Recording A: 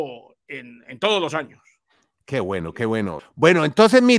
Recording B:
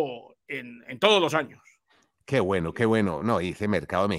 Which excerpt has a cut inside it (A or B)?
A